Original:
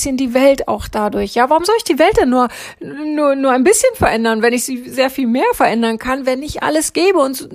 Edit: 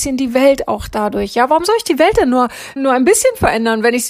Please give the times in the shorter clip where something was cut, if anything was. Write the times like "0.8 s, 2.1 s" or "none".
2.8 s